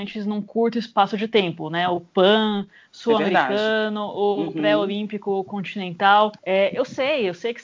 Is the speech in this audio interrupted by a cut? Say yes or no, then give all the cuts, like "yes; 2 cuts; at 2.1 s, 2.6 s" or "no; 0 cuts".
yes; 1 cut; at 6.4 s